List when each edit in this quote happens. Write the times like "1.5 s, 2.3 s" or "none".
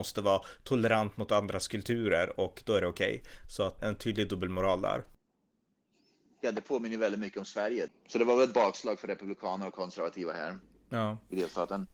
3.8 s, 7.9 s